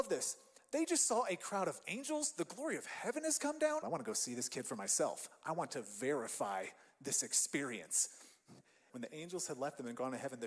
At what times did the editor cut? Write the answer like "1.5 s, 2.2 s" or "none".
3.8 s, 8.9 s